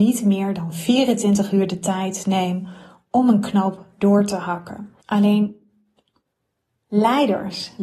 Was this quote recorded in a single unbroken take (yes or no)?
no